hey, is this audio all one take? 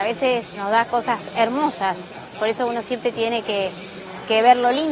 yes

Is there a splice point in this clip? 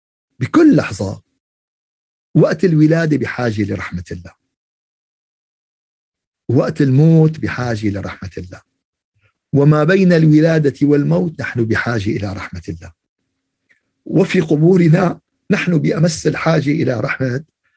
no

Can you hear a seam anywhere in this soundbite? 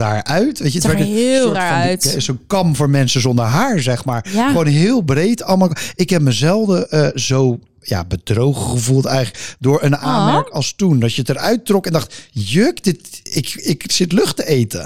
no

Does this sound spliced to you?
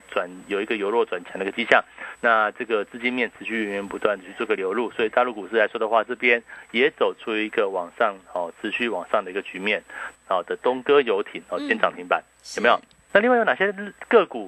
yes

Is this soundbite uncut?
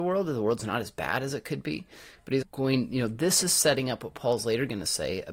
no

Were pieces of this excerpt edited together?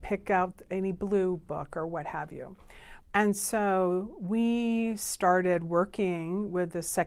yes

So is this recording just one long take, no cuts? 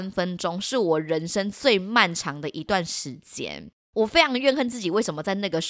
yes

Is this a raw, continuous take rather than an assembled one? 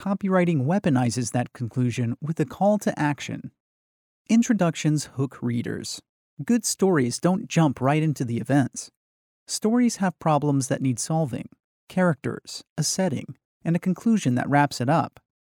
no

